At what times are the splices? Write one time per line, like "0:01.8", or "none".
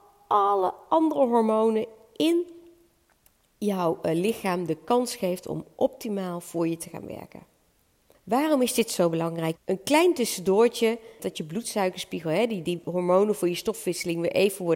0:08.1
0:09.6
0:11.2